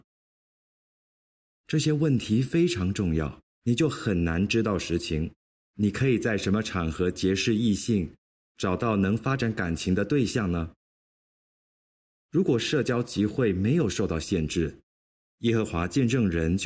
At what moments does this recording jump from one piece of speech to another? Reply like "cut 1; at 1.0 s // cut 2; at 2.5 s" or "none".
cut 1; at 3.5 s // cut 2; at 5.7 s